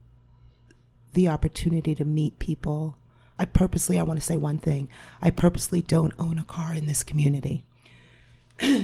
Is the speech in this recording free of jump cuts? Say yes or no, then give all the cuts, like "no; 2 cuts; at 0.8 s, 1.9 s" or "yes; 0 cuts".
no; 1 cut; at 3.4 s